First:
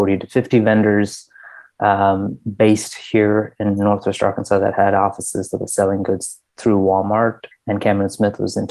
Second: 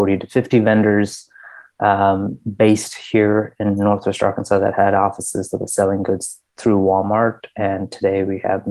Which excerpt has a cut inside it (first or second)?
first